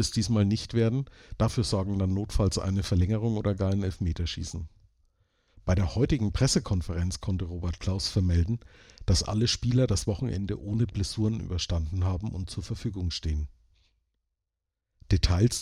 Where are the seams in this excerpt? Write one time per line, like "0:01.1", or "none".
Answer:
none